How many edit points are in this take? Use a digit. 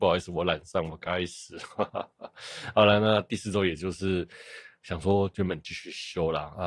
1